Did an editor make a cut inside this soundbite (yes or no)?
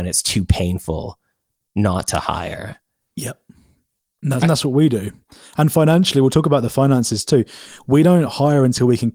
yes